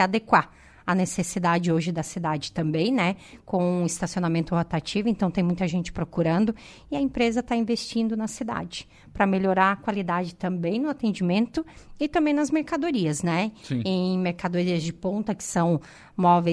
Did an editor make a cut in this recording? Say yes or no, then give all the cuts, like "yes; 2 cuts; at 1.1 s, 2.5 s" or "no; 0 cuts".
no; 0 cuts